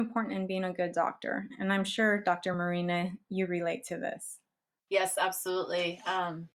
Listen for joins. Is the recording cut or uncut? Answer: uncut